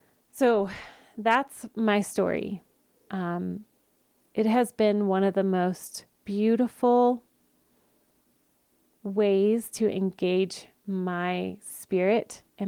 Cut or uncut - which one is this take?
uncut